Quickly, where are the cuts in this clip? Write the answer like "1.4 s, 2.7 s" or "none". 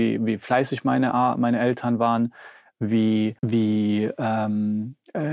3.4 s